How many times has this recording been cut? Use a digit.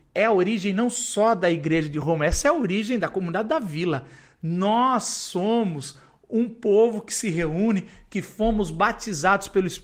0